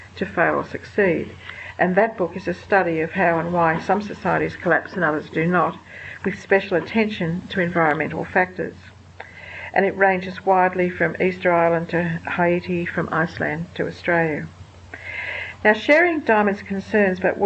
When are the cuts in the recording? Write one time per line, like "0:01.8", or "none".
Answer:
none

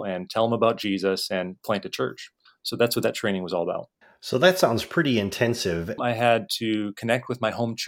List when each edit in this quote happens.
0:06.0

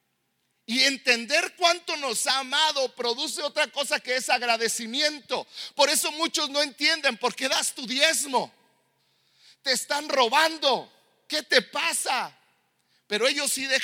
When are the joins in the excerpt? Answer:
none

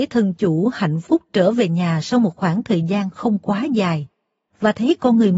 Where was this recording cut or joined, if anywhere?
none

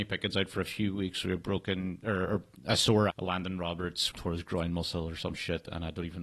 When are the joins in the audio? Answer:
0:03.1
0:04.1

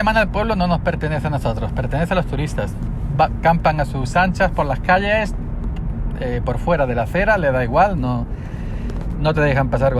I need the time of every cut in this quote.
0:08.0

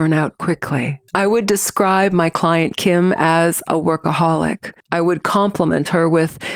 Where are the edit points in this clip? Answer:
0:01.1
0:04.8

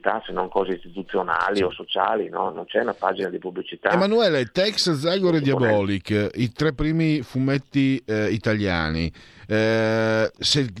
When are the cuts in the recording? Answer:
none

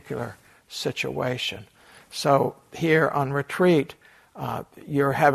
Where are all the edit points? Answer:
none

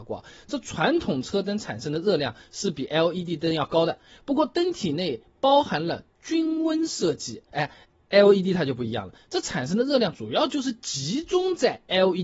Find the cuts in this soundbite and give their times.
0:07.5

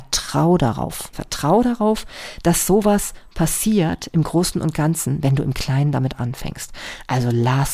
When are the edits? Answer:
0:01.1

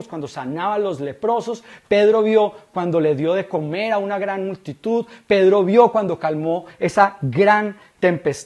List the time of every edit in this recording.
none

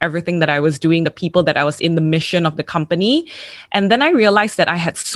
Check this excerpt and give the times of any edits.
none

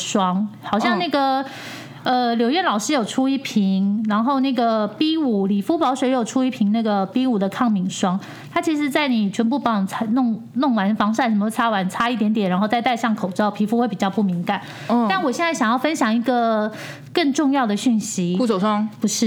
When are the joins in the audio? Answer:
none

